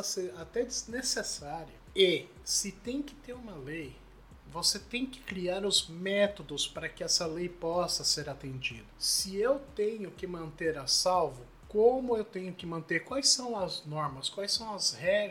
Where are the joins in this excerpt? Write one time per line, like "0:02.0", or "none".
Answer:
none

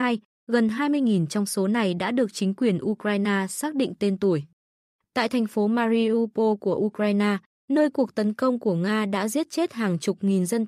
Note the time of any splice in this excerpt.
0:05.0

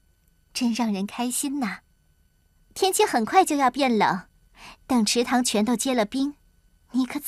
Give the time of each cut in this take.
0:02.6

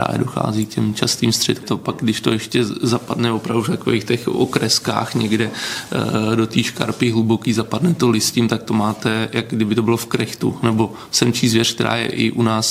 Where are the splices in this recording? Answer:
0:01.6
0:10.6

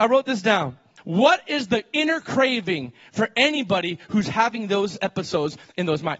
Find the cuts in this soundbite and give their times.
0:01.0

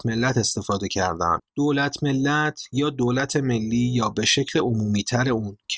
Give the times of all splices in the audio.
0:01.4

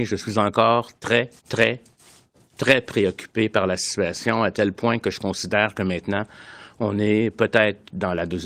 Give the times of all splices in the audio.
0:01.4

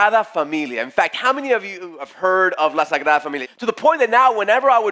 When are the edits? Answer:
0:03.4

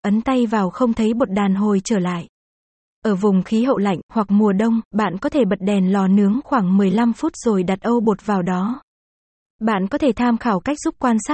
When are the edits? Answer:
none

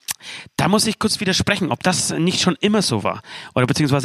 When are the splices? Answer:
none

